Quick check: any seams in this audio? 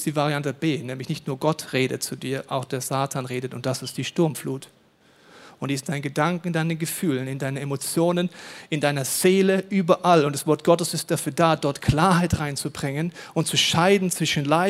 no; 0 cuts

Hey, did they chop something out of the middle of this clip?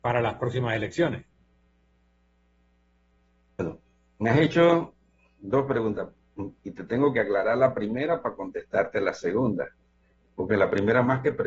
no; 0 cuts

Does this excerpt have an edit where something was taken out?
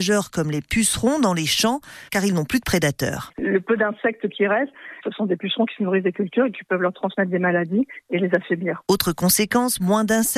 yes; 1 cut; at 3.3 s

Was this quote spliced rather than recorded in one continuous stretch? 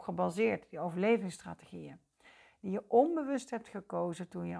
no; 0 cuts

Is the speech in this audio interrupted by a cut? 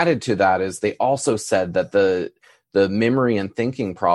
no; 0 cuts

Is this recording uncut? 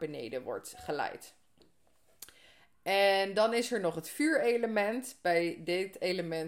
yes; 0 cuts

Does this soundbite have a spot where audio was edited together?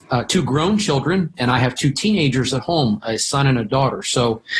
yes; 1 cut; at 1.3 s

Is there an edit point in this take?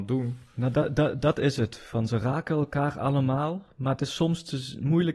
no; 0 cuts

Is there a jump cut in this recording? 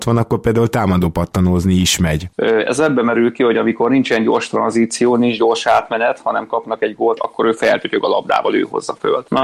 yes; 2 cuts; at 2.3 s, 7.2 s

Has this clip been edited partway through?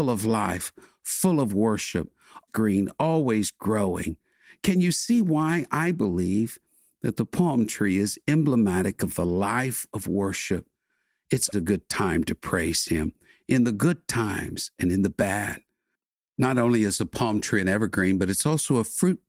yes; 2 cuts; at 2.5 s, 11.5 s

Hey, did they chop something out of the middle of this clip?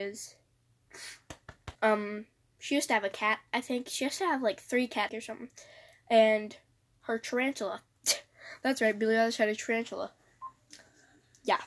yes; 2 cuts; at 1.8 s, 5.1 s

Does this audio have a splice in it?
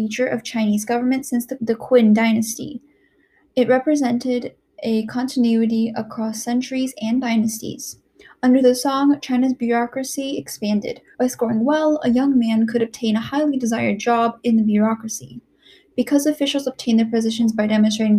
yes; 3 cuts; at 1.6 s, 11.1 s, 15.9 s

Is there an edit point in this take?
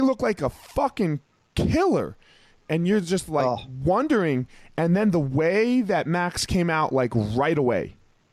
no; 0 cuts

